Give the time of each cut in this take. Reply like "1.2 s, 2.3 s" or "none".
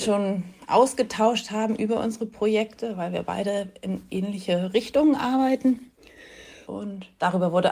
6.6 s